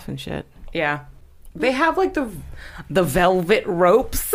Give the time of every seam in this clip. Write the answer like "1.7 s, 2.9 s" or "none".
none